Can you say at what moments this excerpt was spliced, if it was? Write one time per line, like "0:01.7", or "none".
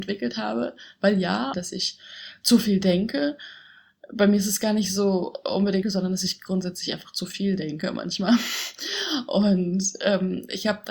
0:01.5
0:05.8